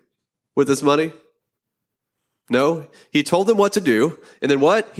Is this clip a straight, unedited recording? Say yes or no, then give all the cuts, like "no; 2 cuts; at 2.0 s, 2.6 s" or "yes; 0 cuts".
yes; 0 cuts